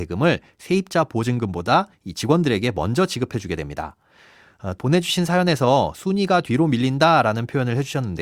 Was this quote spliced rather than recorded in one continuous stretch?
yes; 1 cut; at 4.8 s

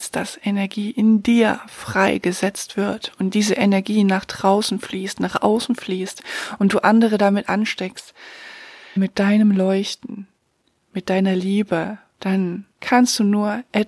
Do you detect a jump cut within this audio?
yes; 1 cut; at 9.0 s

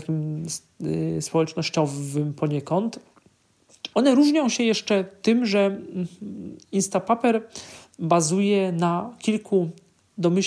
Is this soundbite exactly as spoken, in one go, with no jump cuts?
no; 1 cut; at 3.9 s

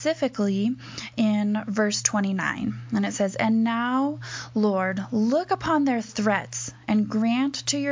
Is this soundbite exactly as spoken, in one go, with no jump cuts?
yes; 0 cuts

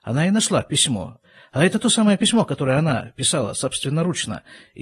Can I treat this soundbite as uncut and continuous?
yes; 0 cuts

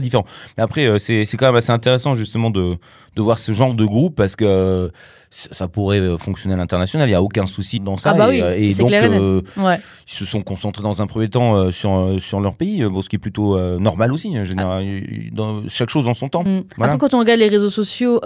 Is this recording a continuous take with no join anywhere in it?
no; 1 cut; at 7.8 s

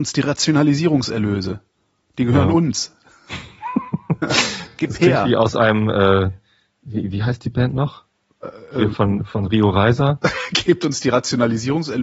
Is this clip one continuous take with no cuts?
yes; 0 cuts

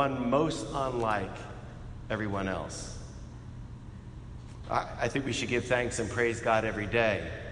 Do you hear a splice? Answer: yes; 1 cut; at 4.6 s

